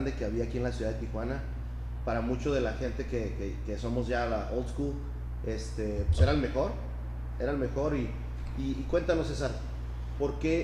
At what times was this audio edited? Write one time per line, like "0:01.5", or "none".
none